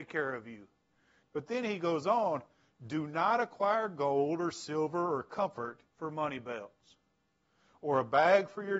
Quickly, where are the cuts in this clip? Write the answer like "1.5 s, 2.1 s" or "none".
1.2 s, 5.9 s